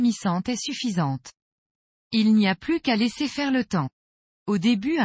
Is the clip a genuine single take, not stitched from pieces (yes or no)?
no